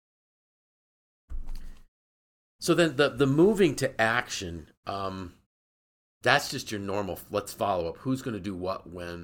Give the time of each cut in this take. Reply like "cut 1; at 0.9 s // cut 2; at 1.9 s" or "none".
none